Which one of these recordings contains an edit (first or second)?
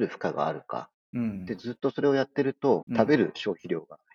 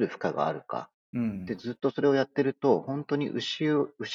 first